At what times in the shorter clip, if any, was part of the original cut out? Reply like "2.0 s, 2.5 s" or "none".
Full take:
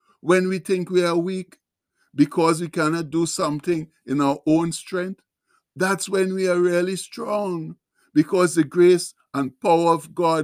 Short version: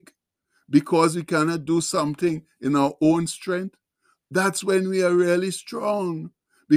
none